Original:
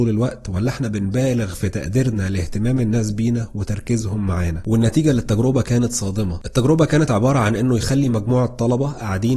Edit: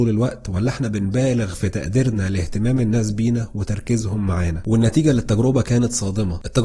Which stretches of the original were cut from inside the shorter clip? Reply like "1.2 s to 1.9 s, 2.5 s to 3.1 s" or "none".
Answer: none